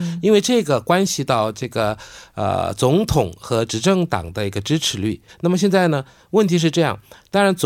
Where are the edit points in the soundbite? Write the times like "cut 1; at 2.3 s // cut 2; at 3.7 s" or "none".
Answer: cut 1; at 5.3 s

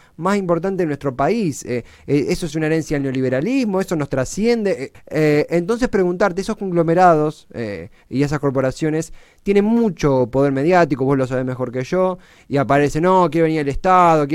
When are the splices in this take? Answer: cut 1; at 4.9 s

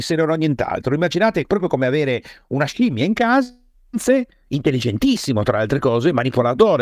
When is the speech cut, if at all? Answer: none

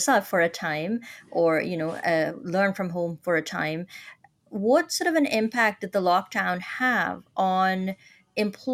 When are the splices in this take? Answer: none

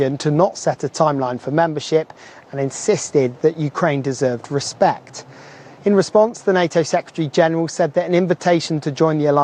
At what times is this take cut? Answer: none

